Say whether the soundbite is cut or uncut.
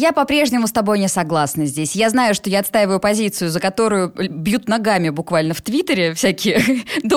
uncut